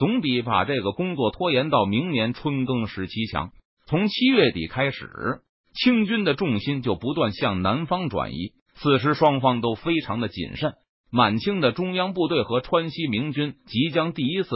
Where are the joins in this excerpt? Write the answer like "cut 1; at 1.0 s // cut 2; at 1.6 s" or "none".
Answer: cut 1; at 8.6 s